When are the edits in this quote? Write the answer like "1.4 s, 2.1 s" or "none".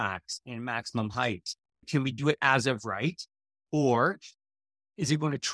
1.8 s